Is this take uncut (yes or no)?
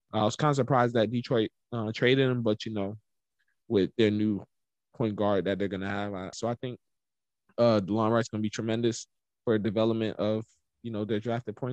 no